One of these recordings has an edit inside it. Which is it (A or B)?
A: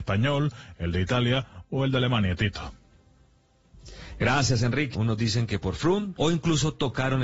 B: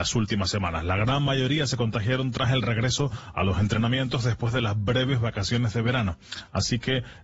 A